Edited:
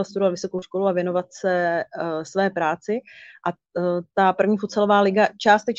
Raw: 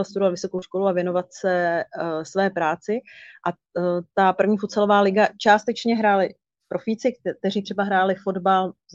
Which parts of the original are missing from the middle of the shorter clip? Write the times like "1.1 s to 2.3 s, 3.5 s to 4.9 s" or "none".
none